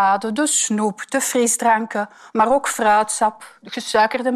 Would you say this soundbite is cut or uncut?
uncut